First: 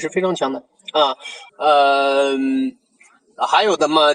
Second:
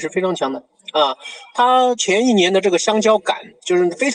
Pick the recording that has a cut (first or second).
first